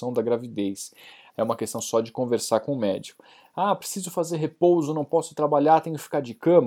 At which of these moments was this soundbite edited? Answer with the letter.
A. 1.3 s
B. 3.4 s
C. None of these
A